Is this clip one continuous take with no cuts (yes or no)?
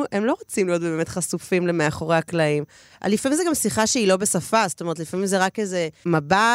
no